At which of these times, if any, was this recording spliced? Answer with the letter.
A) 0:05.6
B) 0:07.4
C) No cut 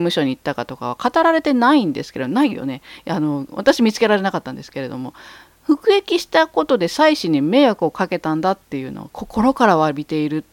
C